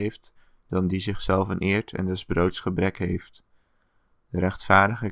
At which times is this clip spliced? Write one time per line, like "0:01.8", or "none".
none